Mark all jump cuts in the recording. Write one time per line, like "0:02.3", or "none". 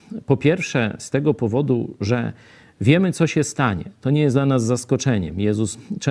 none